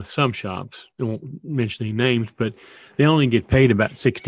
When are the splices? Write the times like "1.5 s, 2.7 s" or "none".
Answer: 0.9 s